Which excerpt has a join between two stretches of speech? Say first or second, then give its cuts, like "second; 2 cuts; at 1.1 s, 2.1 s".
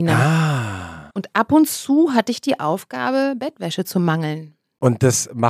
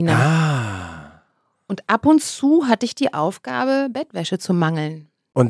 first; 1 cut; at 1.1 s